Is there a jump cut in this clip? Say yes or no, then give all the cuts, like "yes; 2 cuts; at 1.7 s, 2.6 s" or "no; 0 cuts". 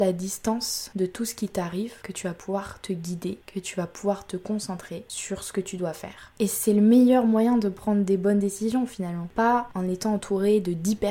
no; 0 cuts